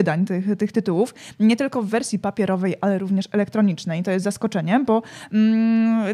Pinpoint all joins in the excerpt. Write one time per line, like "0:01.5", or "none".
none